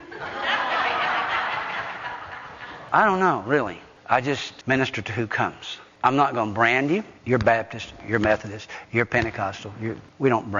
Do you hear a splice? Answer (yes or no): yes